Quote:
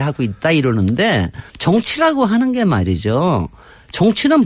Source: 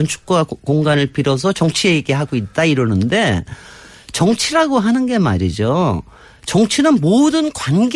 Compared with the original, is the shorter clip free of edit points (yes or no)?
no